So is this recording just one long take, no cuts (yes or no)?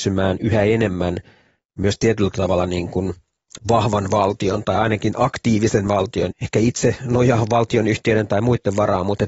no